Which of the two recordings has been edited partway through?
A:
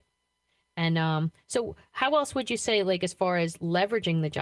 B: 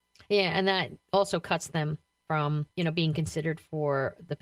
B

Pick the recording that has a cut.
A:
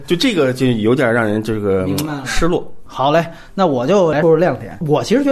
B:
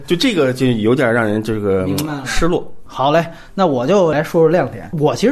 A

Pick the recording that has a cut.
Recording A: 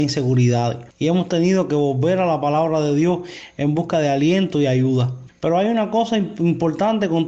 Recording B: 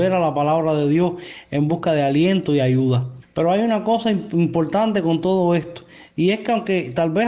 A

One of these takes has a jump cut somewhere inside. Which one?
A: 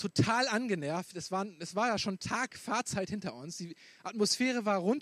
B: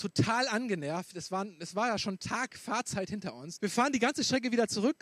B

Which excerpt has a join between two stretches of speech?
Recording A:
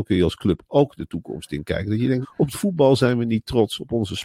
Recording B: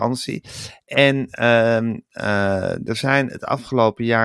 A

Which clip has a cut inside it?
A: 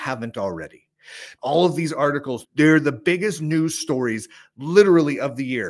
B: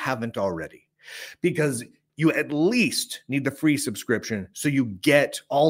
A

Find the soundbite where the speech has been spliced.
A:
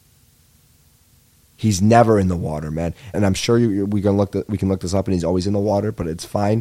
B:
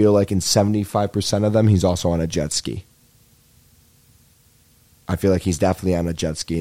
A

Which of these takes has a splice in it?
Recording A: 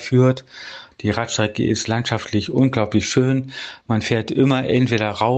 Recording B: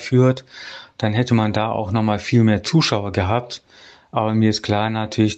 A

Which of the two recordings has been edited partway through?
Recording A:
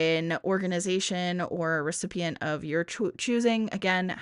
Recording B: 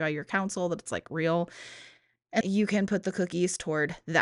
B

